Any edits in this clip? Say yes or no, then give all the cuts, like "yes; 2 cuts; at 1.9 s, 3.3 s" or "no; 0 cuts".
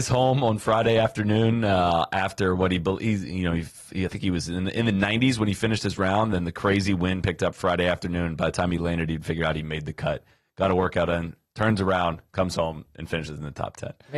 no; 0 cuts